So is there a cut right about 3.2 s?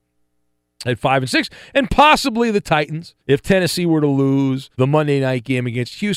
yes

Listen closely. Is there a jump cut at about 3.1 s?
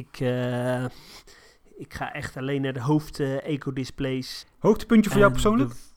no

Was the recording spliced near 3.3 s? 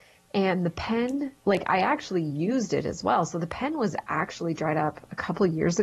no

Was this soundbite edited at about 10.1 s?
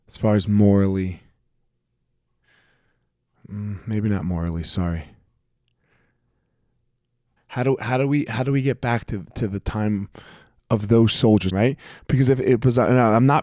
no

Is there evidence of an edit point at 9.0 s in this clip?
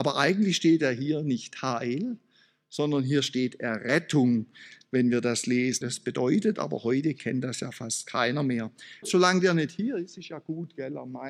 yes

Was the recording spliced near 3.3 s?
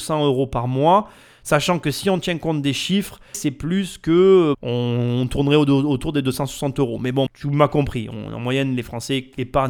yes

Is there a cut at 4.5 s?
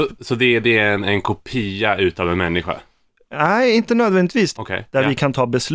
yes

